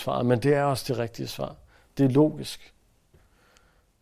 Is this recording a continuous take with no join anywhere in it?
yes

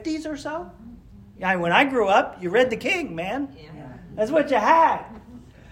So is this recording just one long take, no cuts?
no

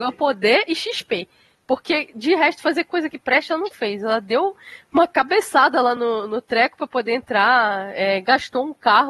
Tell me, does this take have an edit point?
no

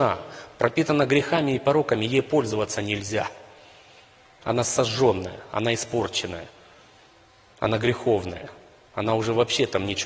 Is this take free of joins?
yes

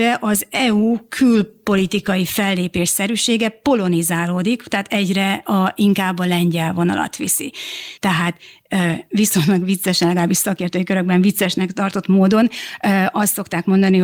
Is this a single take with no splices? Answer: no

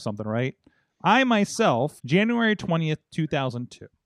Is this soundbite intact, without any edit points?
no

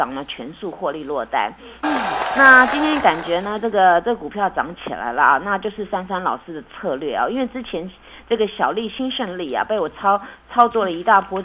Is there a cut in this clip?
yes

